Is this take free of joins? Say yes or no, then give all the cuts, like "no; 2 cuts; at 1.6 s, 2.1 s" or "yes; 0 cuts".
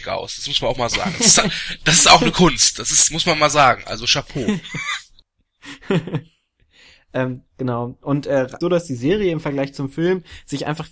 no; 1 cut; at 8.6 s